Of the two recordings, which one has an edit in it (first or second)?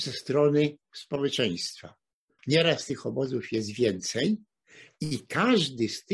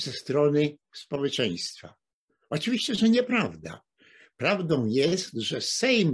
first